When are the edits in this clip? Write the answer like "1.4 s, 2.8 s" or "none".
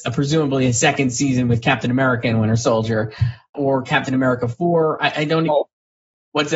3.5 s, 5.5 s

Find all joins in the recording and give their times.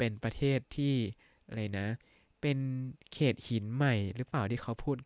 none

